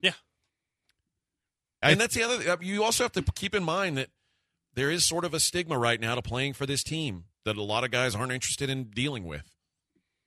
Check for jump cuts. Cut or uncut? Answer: cut